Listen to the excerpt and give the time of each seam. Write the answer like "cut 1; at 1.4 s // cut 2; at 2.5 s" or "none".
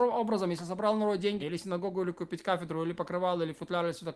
cut 1; at 1.4 s

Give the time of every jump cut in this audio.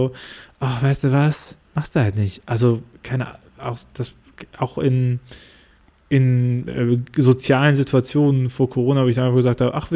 cut 1; at 1.7 s

